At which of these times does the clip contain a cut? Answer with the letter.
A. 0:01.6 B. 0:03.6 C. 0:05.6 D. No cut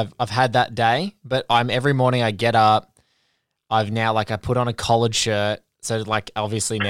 D